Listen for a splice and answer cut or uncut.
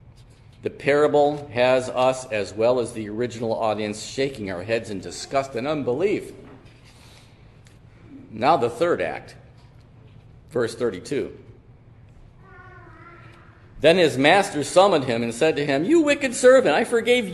uncut